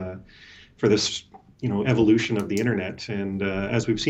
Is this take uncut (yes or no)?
yes